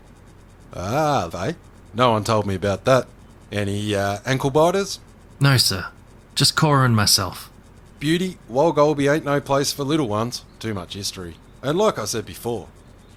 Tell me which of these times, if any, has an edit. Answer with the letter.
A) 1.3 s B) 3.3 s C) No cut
A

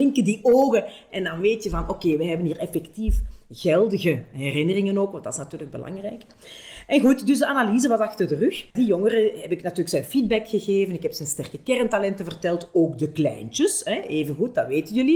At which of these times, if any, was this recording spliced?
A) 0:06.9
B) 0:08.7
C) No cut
B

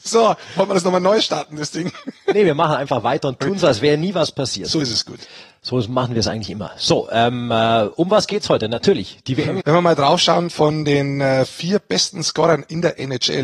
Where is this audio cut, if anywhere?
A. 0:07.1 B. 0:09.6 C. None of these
B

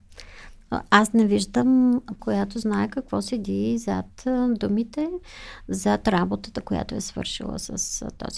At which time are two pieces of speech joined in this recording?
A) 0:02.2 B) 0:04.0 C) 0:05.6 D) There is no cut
A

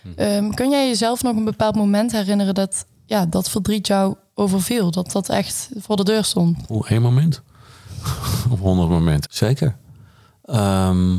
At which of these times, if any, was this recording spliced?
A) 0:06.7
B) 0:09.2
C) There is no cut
B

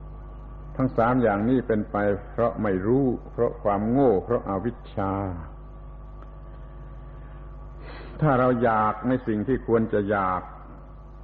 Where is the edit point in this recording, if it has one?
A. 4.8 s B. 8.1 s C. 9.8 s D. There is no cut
D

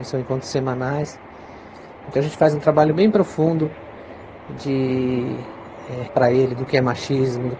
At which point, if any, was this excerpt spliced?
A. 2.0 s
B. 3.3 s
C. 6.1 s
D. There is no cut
C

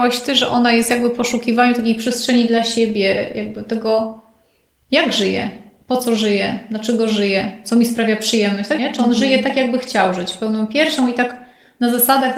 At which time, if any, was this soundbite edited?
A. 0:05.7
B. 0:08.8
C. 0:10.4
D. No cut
B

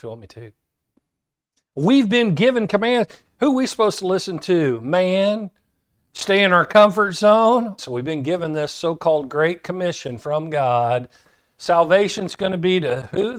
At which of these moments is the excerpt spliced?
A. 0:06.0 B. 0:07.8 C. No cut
B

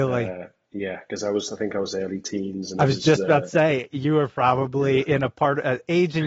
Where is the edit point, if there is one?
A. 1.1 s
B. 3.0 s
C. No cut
C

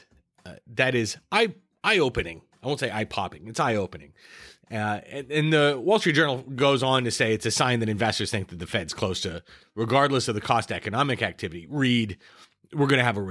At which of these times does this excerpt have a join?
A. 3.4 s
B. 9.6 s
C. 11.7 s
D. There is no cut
B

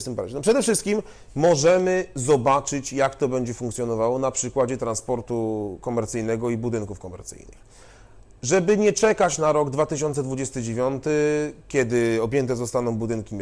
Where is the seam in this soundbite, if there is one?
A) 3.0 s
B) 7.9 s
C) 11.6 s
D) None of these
D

